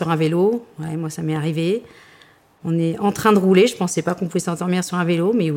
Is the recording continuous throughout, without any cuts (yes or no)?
yes